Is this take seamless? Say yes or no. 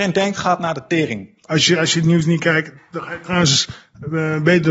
no